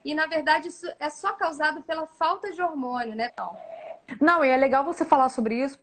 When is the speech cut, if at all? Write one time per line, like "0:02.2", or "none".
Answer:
0:03.3

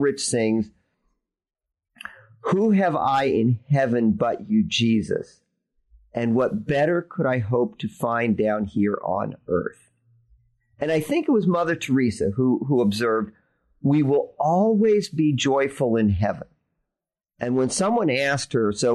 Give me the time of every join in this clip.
none

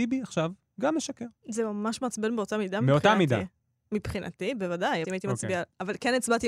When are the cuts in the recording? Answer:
0:05.0

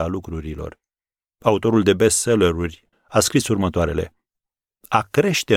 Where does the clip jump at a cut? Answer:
0:01.3
0:02.9

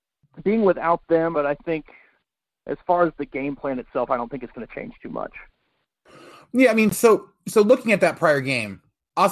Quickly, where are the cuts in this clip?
0:01.3

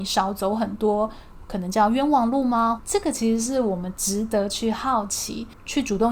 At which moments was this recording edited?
0:02.8

